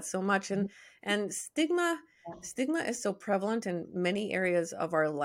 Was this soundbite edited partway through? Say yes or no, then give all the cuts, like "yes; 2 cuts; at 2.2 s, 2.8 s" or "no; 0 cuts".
no; 0 cuts